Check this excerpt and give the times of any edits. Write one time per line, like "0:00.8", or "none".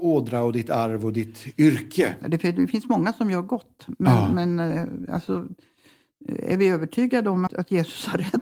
0:02.2
0:07.5